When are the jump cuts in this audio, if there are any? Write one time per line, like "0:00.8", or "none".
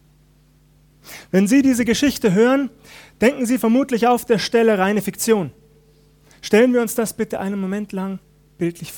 0:06.3

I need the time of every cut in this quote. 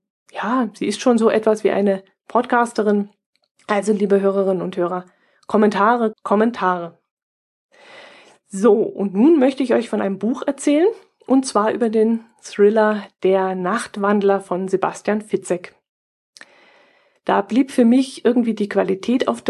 0:06.1
0:17.2

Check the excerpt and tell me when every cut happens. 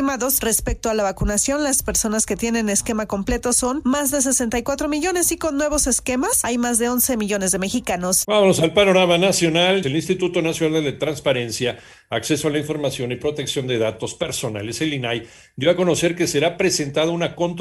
0:08.2
0:09.8

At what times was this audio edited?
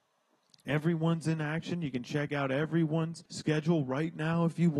0:03.3

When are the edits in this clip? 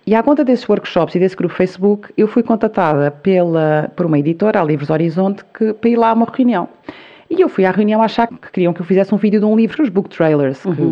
0:08.3
0:09.8

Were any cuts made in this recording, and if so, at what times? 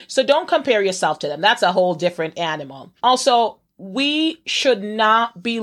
0:03.0

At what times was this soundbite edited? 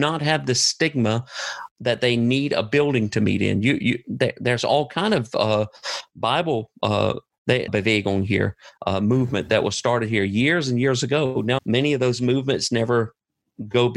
0:07.7
0:08.8
0:11.6

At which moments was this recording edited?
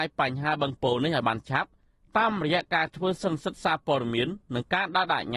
none

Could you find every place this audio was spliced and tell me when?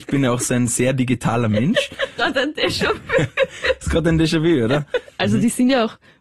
0:02.2
0:05.2

